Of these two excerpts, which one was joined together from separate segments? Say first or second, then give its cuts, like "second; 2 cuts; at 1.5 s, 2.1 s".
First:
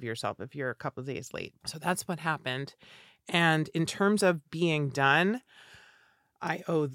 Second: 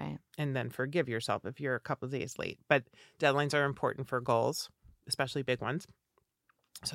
first; 1 cut; at 1.6 s